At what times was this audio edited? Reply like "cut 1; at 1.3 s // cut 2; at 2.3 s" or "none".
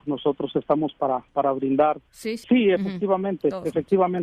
cut 1; at 2.4 s